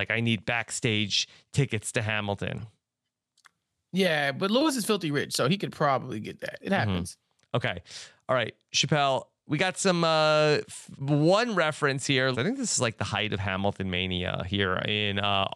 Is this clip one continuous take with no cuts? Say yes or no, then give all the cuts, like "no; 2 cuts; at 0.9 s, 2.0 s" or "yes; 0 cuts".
no; 2 cuts; at 6.6 s, 12.3 s